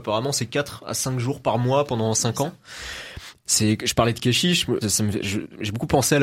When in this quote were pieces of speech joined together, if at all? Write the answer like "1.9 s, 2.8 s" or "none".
3.4 s, 4.8 s